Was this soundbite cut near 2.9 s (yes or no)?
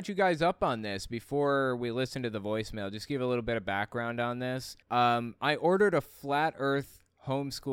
no